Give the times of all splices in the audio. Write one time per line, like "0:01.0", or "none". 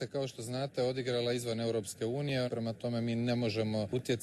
0:02.5